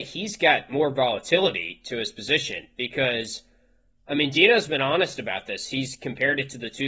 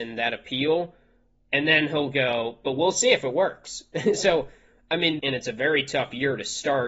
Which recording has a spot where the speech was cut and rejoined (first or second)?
second